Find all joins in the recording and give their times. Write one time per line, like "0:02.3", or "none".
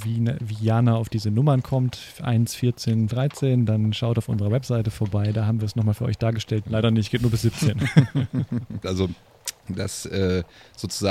0:03.1
0:06.6
0:08.8